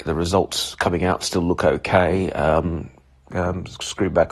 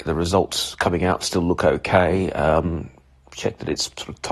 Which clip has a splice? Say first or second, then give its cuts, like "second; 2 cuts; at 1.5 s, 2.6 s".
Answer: first; 1 cut; at 3.3 s